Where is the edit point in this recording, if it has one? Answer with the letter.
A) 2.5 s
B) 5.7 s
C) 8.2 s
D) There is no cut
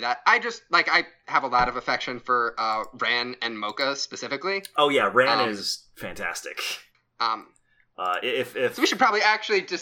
D